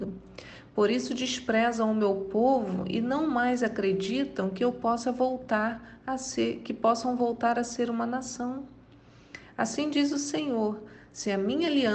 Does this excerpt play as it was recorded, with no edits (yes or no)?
yes